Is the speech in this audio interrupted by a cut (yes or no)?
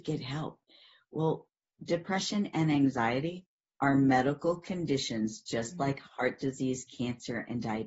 no